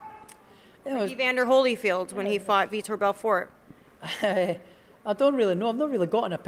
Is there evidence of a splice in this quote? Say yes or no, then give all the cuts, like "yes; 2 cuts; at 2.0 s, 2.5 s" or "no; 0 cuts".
no; 0 cuts